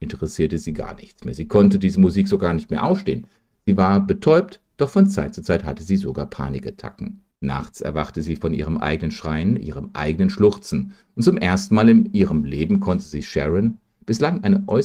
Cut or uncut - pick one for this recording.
cut